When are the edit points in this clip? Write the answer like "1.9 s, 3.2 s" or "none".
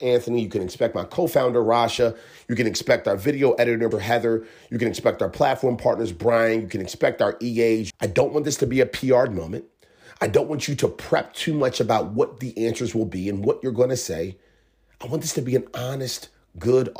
3.9 s, 7.9 s